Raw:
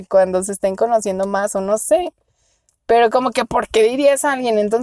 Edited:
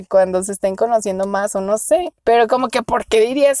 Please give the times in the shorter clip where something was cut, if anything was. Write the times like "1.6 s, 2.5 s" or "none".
2.2 s